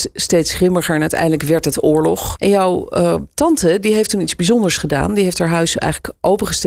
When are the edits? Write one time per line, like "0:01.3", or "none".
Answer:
0:02.4